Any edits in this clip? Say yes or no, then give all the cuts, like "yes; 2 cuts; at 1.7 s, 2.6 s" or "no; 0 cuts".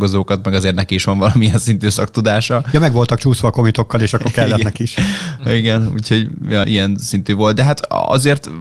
yes; 1 cut; at 6.6 s